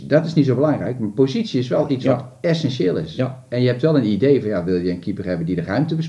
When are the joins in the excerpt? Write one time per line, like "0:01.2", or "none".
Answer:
none